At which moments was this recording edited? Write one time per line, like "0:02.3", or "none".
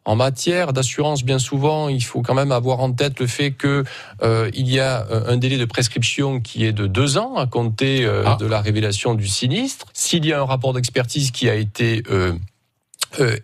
0:09.9